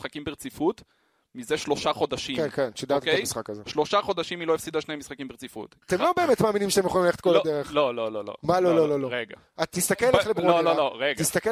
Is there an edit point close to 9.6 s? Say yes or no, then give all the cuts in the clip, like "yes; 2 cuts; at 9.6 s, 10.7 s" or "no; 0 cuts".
no; 1 cut; at 5.8 s